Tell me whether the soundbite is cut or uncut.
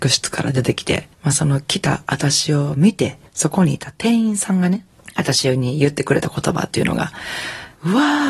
cut